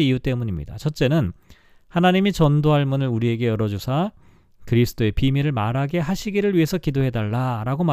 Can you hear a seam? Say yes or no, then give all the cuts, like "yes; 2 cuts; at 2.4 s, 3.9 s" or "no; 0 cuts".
no; 0 cuts